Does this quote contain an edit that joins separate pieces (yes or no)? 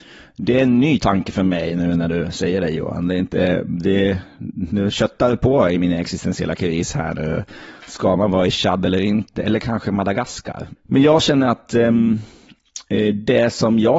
yes